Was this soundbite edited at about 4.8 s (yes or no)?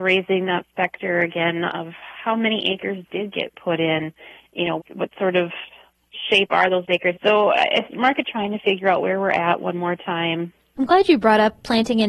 yes